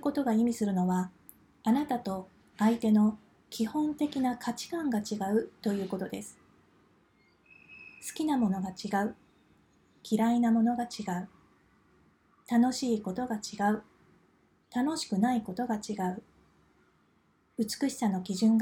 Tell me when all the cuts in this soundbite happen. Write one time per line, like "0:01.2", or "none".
none